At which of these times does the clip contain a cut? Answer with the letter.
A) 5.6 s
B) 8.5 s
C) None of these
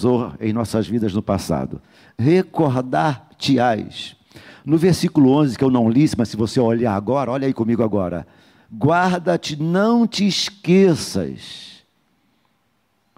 C